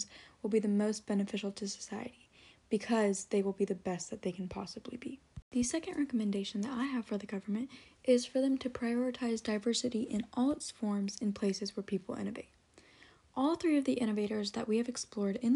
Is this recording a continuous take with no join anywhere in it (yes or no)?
yes